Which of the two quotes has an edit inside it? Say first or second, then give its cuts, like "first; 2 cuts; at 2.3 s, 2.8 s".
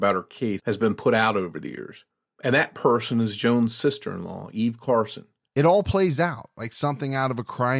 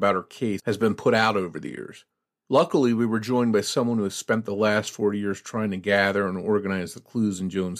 first; 2 cuts; at 2.3 s, 5.5 s